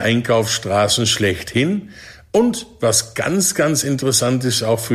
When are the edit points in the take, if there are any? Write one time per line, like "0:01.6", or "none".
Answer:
none